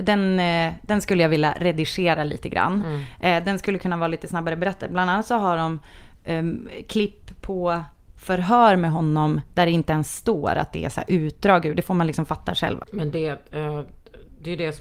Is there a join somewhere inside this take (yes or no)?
yes